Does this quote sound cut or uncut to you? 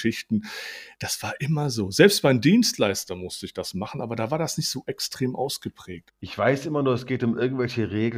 cut